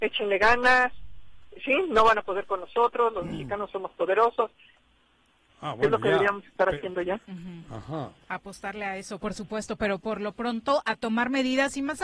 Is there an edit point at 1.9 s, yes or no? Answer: no